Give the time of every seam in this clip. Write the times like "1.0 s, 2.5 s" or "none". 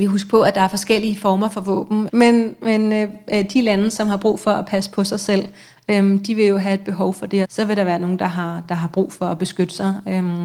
2.1 s, 7.4 s